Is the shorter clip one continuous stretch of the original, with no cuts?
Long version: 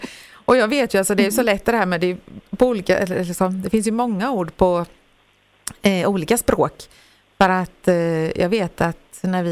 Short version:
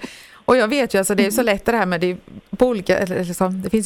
yes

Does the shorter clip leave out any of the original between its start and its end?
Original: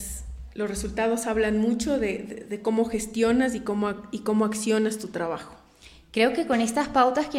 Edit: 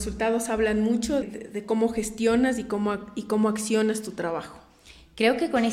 yes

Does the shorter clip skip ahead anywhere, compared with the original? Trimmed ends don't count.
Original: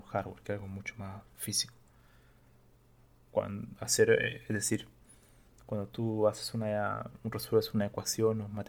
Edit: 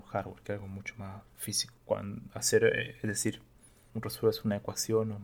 yes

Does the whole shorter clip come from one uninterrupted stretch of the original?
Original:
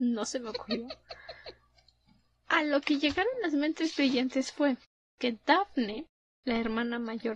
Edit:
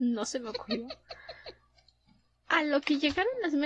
yes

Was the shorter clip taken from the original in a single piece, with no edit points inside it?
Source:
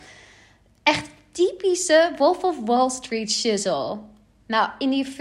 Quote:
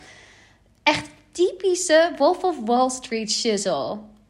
yes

